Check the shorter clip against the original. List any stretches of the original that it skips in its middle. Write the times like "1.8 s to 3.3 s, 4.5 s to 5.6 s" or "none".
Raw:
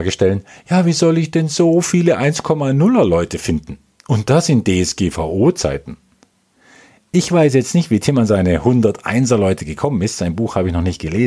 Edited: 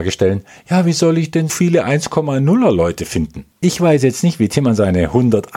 1.5 s to 1.8 s, 3.8 s to 7.0 s